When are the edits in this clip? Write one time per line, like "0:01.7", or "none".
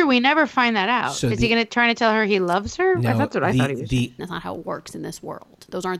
0:04.2